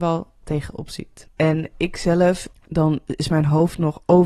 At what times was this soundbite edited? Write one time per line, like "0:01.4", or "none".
0:01.3
0:02.5